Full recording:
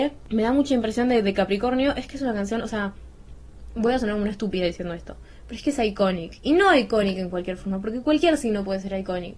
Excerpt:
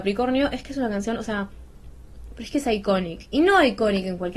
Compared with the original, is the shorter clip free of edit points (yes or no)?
no